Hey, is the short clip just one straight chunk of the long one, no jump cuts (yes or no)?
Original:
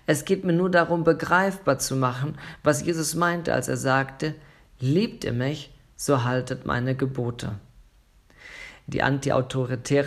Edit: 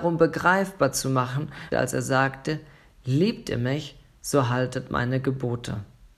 no